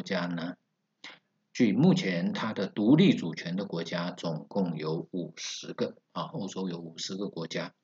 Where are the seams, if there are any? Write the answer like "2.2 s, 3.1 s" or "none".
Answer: 6.3 s